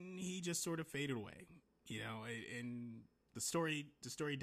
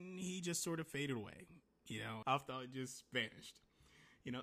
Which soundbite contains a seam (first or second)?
second